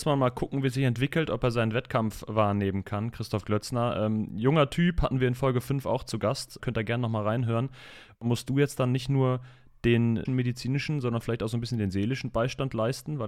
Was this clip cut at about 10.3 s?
yes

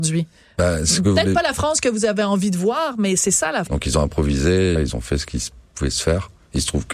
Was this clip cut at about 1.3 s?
no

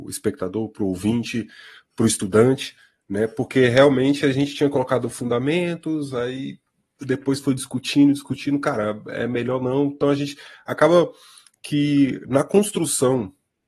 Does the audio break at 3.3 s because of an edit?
no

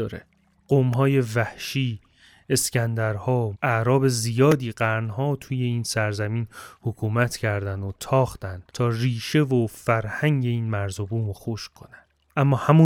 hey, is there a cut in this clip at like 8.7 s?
yes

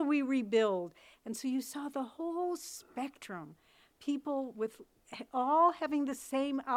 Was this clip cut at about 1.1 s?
no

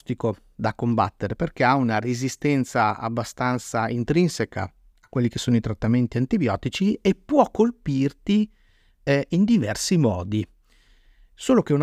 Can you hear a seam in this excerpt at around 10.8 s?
no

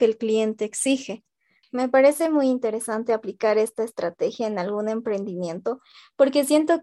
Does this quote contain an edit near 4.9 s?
no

